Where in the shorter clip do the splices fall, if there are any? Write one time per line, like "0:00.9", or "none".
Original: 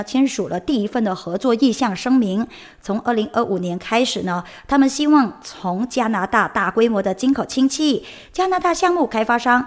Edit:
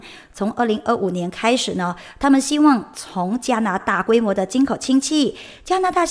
0:03.8